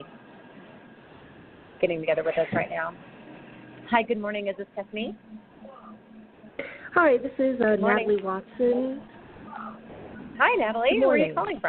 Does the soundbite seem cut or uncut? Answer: uncut